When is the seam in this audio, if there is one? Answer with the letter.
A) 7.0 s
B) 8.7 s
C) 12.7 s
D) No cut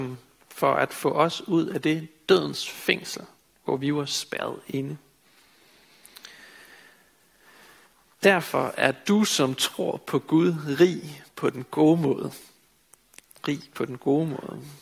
D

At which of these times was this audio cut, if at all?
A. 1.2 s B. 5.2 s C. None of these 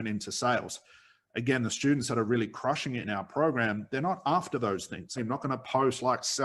B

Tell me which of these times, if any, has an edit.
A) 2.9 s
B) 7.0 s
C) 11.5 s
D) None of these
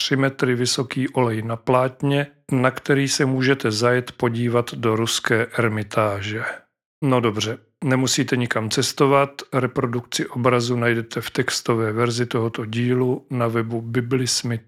B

